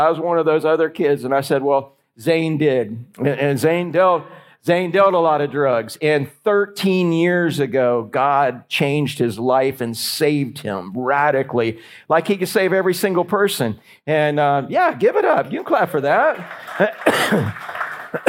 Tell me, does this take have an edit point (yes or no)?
no